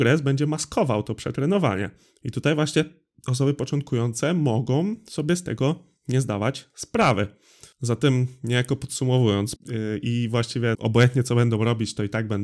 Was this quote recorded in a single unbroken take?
no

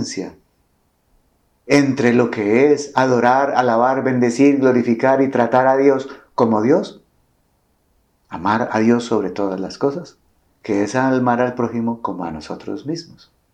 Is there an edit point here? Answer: yes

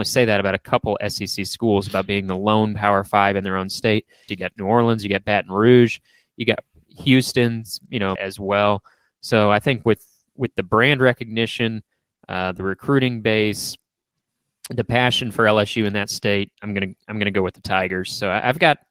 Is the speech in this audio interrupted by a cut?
yes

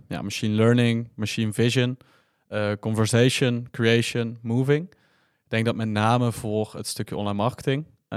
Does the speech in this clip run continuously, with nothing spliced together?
yes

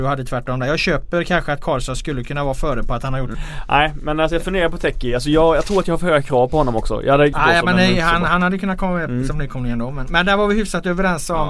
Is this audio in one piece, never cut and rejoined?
no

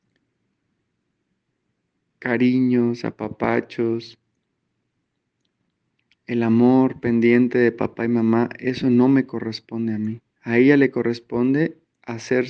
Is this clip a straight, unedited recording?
no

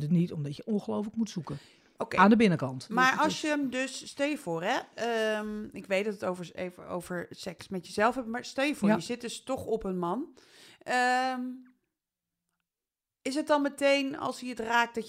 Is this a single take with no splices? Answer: yes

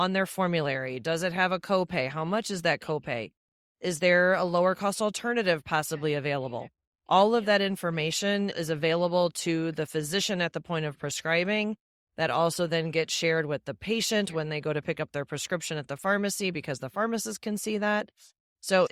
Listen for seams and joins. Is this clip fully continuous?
yes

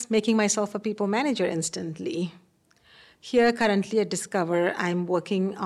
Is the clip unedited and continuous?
yes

